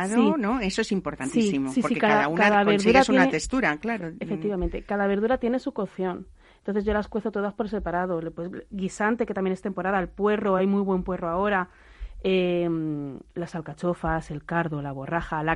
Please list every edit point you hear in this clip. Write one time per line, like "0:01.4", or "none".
none

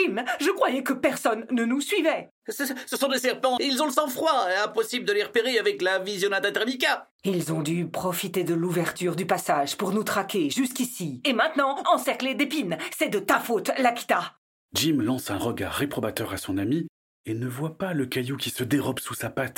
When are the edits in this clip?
0:03.6
0:11.8

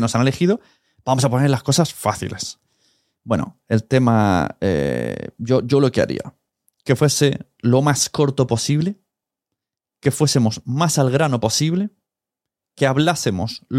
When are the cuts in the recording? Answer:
none

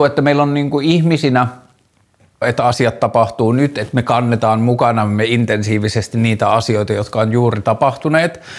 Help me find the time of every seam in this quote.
0:02.4

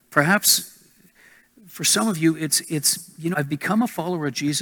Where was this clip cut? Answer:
0:03.3

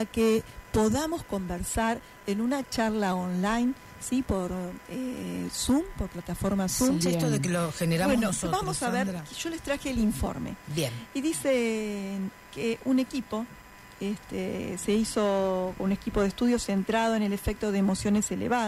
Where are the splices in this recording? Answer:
0:07.0

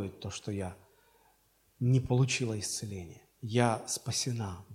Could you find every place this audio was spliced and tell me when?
0:03.3

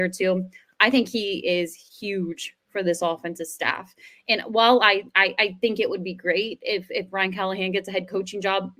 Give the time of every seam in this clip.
none

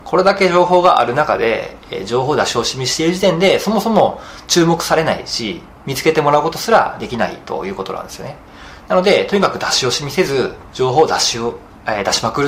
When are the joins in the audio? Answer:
none

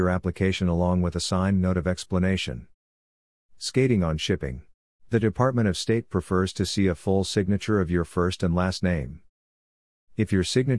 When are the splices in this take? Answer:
0:05.0

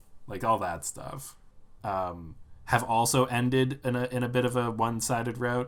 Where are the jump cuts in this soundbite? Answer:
0:01.8

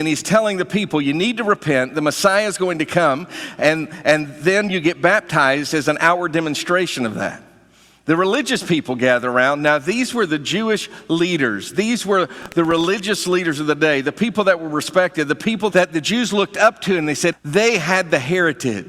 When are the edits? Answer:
0:15.7
0:17.3

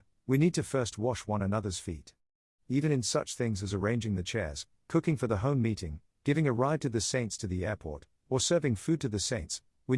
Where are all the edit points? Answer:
none

